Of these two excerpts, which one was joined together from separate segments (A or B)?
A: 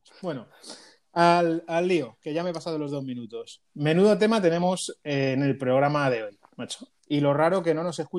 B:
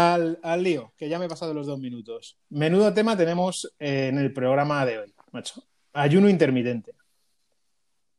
A